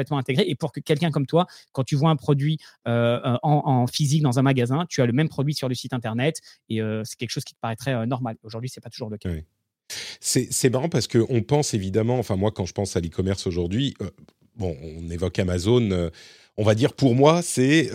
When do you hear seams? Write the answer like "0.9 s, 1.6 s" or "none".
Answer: none